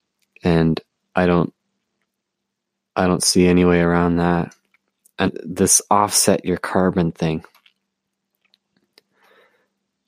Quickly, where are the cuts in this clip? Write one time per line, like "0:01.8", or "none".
0:05.3

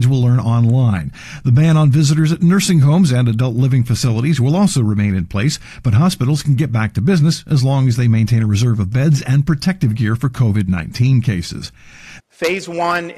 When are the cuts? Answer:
0:12.2

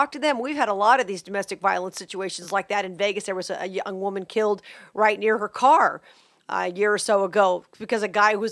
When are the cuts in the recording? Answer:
none

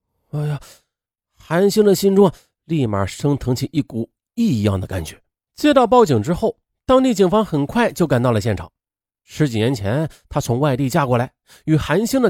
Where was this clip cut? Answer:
0:05.5
0:09.3

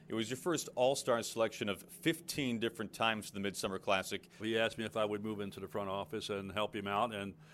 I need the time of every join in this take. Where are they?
0:04.4

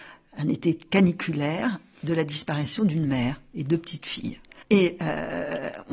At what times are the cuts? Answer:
0:04.6

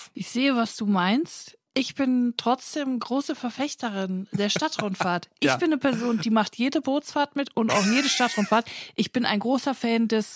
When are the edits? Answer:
none

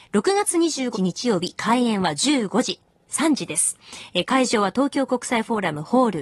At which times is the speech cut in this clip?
0:00.9

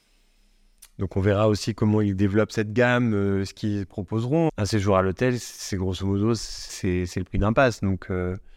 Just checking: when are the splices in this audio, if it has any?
0:04.5
0:06.7

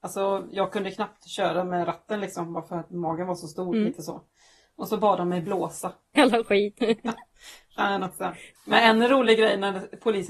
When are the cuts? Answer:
0:06.2
0:08.6

